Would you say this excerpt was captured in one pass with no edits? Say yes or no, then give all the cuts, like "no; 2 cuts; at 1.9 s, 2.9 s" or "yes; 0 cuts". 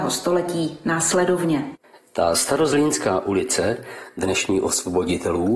yes; 0 cuts